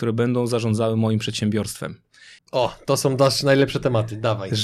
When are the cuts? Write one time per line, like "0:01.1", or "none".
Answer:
0:02.4